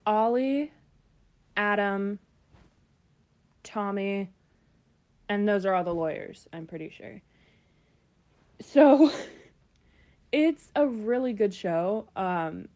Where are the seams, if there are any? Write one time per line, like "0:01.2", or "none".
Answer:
none